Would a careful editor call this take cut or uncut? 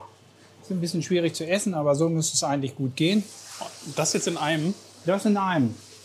uncut